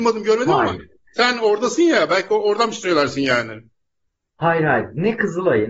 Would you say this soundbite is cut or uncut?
uncut